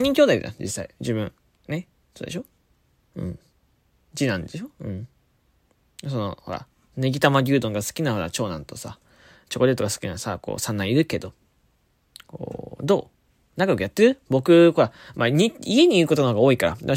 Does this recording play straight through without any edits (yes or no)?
yes